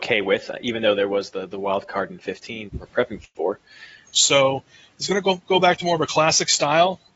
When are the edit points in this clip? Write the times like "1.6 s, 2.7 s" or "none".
2.7 s, 4.0 s